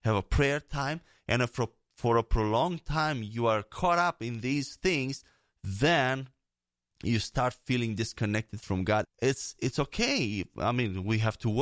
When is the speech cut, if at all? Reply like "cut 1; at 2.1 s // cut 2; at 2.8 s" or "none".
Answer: cut 1; at 9.0 s

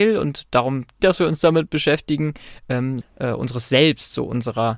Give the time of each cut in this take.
cut 1; at 1.0 s // cut 2; at 3.0 s

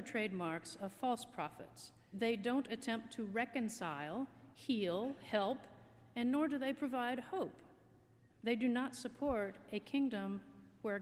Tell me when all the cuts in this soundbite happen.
cut 1; at 2.1 s // cut 2; at 8.3 s

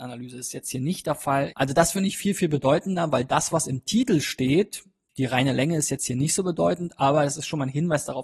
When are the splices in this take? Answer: cut 1; at 1.5 s

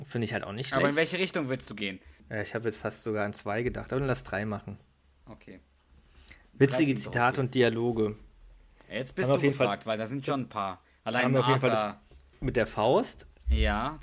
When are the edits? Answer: cut 1; at 2.2 s

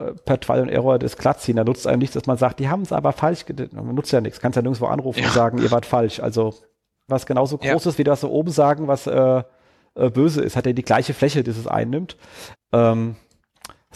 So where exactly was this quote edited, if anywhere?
cut 1; at 7.1 s // cut 2; at 12.5 s

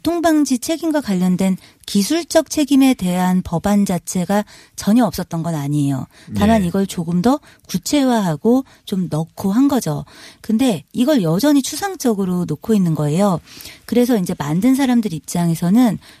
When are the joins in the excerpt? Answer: none

